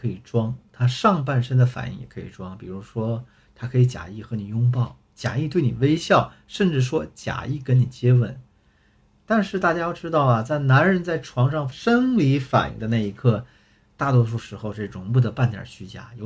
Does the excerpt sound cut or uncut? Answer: cut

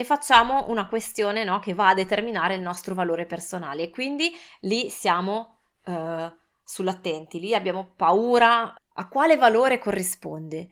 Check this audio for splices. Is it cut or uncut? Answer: cut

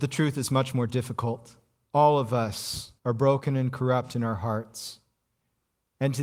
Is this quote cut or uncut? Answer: cut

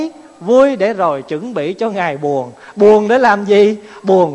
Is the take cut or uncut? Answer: uncut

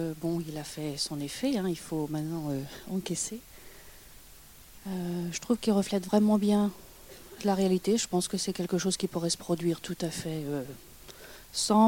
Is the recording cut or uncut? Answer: uncut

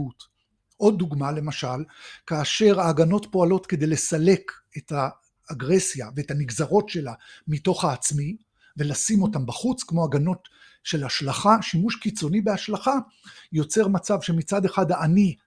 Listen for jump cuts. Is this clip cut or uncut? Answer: uncut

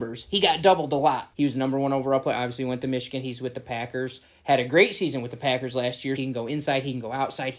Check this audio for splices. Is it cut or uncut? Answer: cut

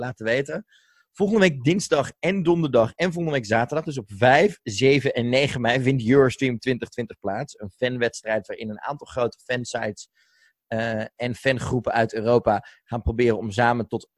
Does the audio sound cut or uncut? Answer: uncut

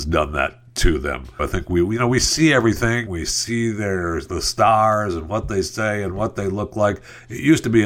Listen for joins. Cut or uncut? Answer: cut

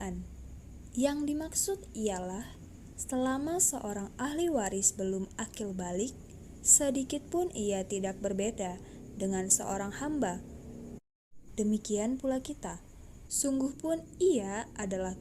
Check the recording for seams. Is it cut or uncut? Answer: cut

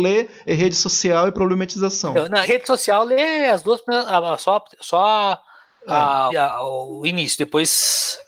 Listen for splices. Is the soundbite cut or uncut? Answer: cut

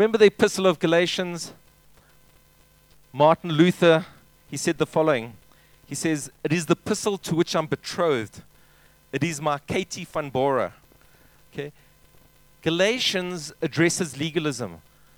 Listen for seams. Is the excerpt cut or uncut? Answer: uncut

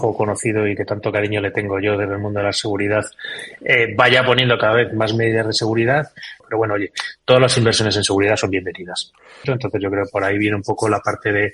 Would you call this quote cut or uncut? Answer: cut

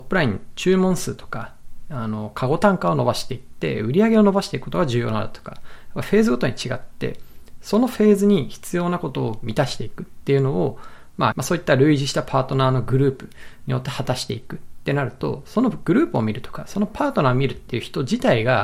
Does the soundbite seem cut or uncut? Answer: cut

